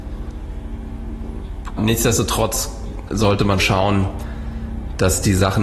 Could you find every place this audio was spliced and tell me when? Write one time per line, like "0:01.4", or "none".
0:01.8
0:03.6